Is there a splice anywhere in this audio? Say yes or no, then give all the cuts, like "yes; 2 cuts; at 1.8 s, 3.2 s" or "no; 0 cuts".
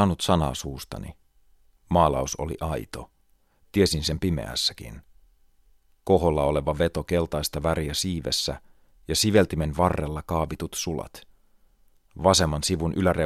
no; 0 cuts